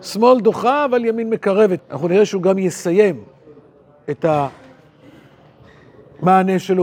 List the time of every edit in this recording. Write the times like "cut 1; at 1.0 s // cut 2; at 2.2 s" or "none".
cut 1; at 1.8 s